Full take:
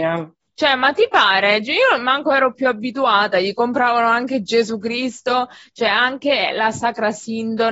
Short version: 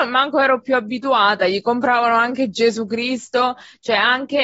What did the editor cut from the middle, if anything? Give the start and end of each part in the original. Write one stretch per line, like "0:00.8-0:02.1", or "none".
none